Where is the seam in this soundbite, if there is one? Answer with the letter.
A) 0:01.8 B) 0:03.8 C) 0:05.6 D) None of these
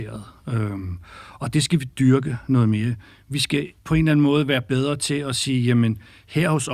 B